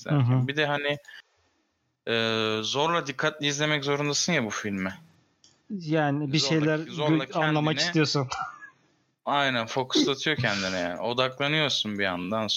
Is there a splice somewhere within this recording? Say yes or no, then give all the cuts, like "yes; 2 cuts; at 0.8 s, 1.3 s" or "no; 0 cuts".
no; 0 cuts